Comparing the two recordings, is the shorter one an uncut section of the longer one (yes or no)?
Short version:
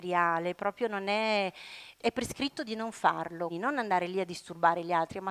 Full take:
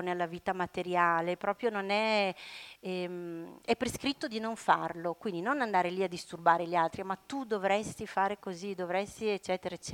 no